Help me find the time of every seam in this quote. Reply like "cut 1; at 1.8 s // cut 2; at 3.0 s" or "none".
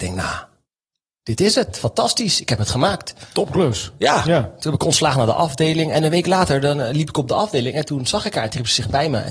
none